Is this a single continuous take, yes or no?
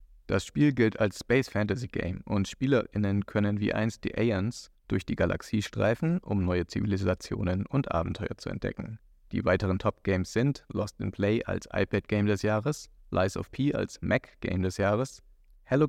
yes